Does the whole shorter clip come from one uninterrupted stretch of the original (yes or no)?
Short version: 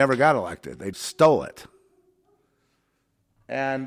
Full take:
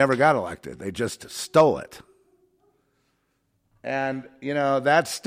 no